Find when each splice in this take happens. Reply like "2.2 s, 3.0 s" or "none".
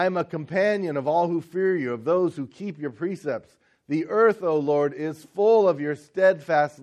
none